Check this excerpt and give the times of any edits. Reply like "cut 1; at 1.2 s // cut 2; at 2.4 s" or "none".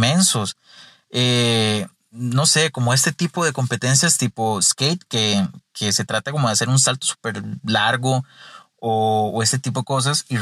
none